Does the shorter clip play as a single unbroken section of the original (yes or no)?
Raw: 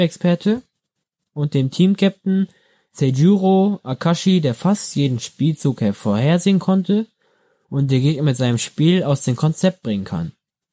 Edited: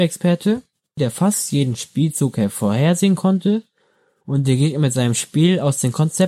no